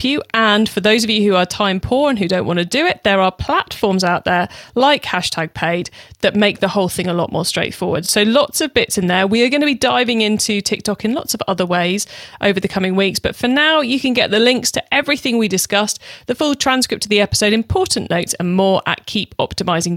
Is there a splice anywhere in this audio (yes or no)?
no